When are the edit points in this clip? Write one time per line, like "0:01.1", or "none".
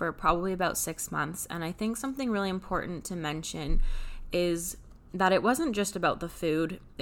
none